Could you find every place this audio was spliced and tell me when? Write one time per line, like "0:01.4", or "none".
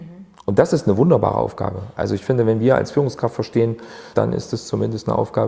0:04.2